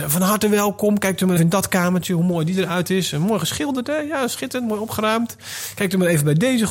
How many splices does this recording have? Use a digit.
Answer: 1